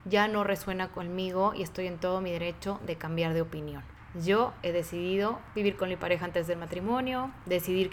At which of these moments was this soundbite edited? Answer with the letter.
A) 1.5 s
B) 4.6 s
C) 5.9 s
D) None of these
B